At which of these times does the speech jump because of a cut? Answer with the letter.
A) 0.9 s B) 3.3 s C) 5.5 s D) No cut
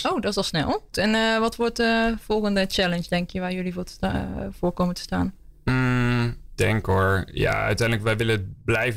A